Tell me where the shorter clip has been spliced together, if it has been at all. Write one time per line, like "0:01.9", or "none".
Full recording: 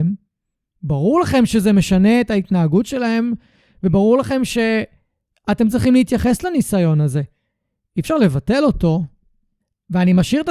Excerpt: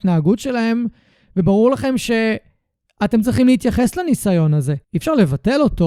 0:04.8